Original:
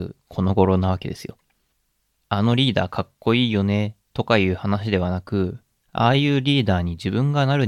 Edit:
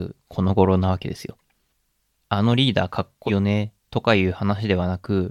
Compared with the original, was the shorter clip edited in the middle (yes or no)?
yes